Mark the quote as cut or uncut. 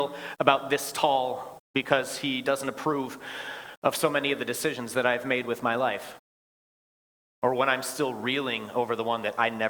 cut